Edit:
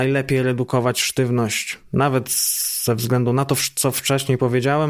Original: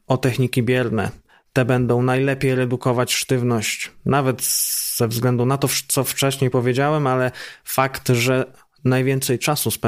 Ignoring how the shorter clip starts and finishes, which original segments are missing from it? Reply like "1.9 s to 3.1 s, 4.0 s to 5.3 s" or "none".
none